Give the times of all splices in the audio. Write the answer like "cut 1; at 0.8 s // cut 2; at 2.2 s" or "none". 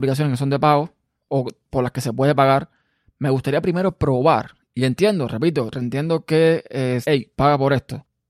cut 1; at 4.6 s // cut 2; at 7.0 s